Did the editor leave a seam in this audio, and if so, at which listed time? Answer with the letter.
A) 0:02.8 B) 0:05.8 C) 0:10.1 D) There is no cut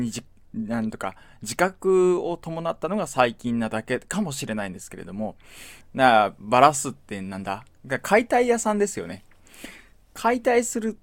B